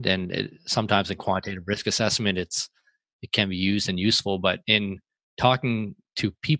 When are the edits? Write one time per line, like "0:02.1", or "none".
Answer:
none

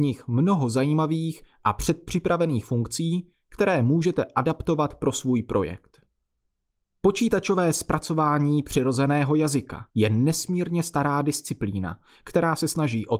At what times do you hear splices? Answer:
0:09.9

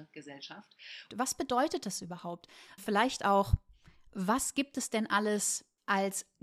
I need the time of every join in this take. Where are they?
0:01.1
0:02.8

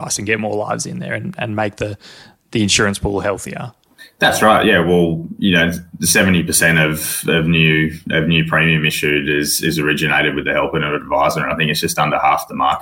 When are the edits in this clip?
none

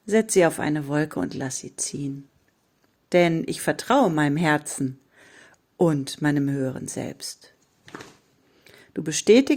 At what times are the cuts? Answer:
0:03.0

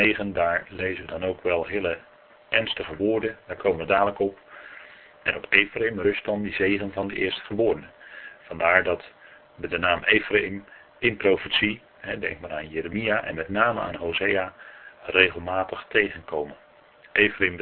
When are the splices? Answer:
0:05.1

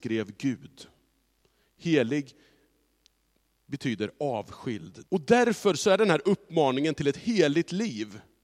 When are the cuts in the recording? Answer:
0:01.6
0:05.0

